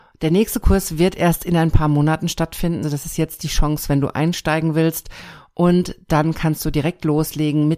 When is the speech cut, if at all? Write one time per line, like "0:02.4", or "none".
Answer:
0:02.8